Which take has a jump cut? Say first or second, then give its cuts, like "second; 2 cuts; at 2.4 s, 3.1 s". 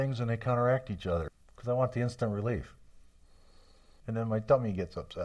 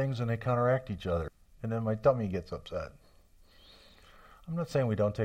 first; 2 cuts; at 1.4 s, 4.0 s